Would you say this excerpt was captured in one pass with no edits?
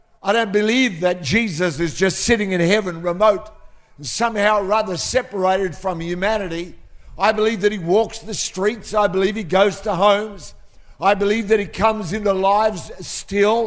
yes; 0 cuts

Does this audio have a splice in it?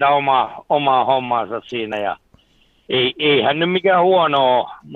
no; 0 cuts

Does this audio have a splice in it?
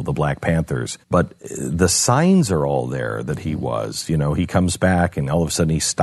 yes; 1 cut; at 1.0 s

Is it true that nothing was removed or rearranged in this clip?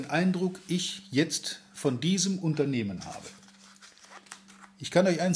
yes; 0 cuts

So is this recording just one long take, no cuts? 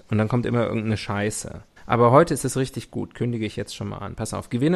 no; 1 cut; at 1.8 s

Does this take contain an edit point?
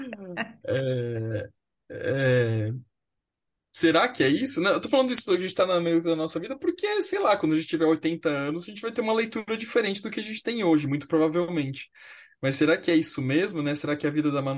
no; 0 cuts

